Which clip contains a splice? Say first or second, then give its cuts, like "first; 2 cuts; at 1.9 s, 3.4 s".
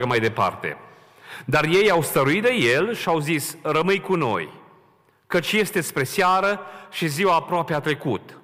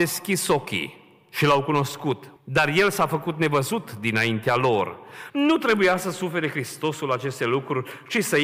second; 2 cuts; at 2.4 s, 5.3 s